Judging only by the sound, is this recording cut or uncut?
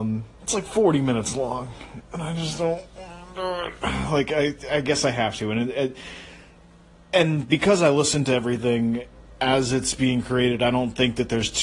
uncut